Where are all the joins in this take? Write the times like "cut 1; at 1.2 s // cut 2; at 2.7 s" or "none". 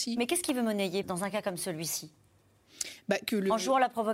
cut 1; at 1.0 s